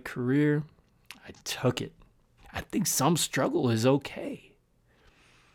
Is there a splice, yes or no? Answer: yes